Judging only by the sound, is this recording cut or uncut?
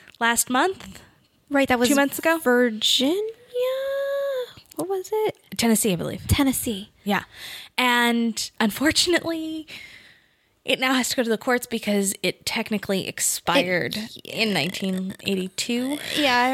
uncut